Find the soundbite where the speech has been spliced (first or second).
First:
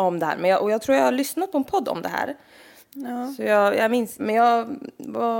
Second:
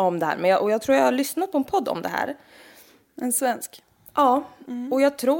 first